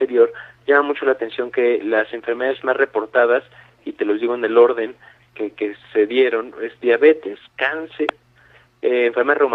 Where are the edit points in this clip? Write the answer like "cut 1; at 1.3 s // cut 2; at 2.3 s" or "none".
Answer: cut 1; at 1.8 s